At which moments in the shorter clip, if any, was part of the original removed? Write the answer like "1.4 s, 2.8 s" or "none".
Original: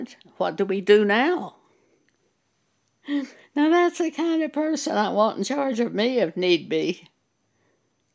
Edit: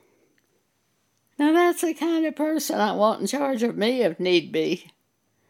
1.3 s